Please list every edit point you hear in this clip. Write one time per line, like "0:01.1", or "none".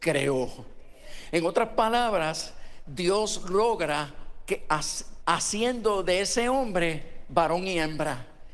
0:05.2